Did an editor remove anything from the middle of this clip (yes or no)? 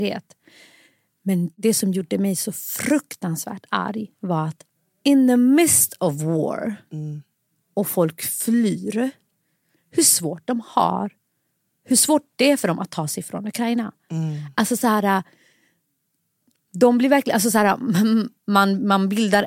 yes